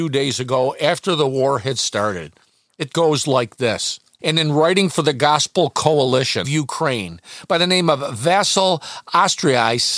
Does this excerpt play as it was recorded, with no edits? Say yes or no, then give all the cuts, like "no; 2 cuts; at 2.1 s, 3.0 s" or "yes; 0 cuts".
no; 2 cuts; at 4.2 s, 6.4 s